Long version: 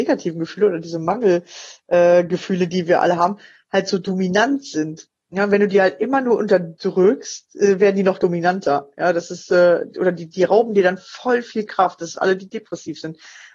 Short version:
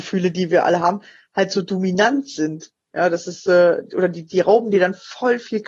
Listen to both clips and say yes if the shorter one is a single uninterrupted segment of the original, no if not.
no